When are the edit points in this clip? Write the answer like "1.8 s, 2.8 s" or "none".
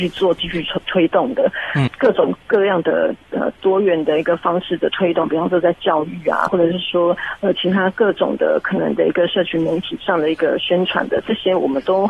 1.9 s, 6.5 s

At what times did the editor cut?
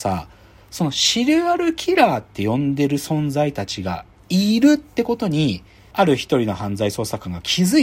5.9 s

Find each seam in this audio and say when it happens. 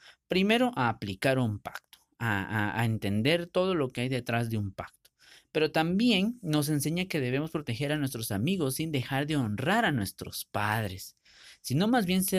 none

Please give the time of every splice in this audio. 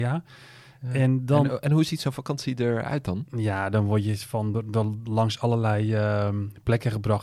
none

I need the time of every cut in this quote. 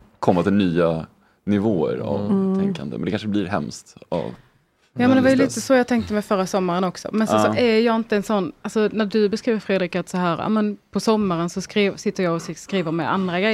none

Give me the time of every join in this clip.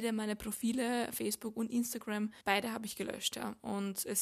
2.4 s

